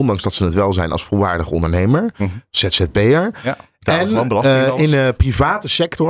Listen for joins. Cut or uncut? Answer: uncut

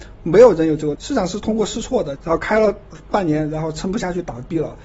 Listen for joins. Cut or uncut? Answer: cut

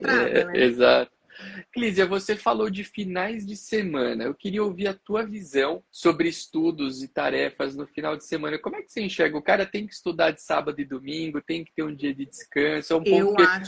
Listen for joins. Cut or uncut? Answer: cut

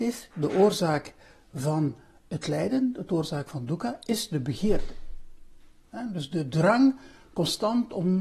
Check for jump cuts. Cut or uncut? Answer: cut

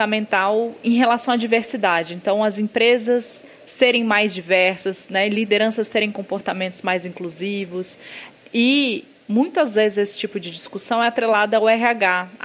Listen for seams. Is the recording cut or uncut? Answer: uncut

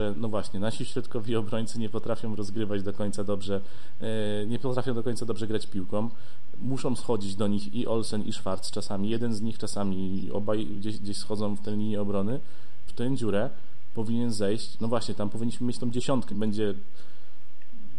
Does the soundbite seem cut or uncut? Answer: cut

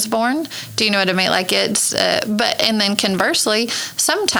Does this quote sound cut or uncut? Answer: uncut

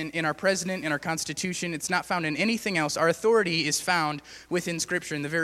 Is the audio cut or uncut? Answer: uncut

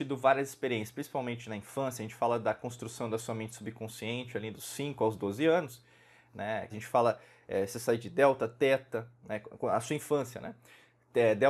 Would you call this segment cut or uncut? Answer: cut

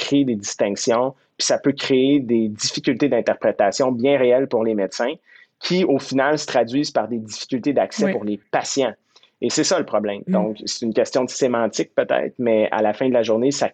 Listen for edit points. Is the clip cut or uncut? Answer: cut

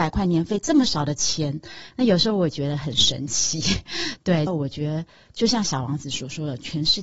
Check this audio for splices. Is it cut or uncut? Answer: cut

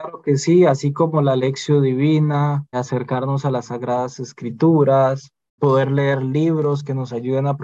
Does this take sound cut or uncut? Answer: cut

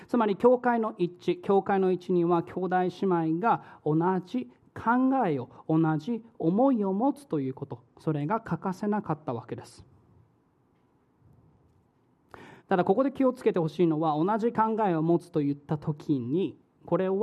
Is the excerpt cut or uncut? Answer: cut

